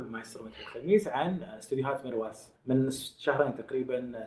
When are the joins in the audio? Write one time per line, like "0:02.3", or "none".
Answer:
0:02.6